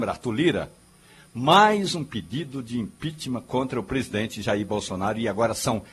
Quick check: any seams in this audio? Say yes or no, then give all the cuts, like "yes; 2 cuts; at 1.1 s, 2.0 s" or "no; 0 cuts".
no; 0 cuts